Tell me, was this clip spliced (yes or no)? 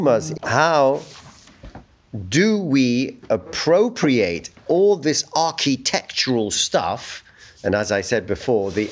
no